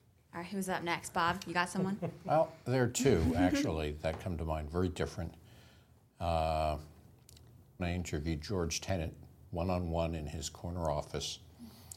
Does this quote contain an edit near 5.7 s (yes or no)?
no